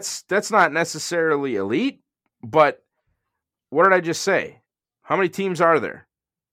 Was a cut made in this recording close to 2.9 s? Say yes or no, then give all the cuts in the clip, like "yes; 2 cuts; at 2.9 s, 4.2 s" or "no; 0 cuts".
no; 1 cut; at 5.0 s